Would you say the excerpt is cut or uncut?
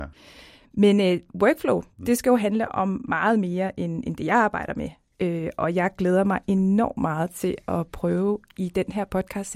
uncut